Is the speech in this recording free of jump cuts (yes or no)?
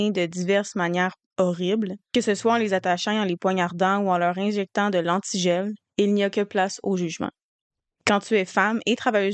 no